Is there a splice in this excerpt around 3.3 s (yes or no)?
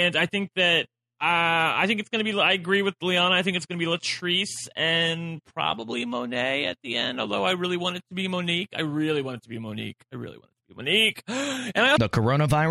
no